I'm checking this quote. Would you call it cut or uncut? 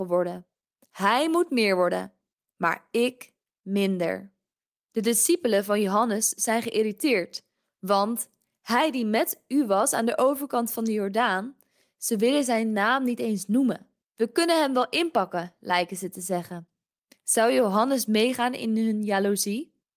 cut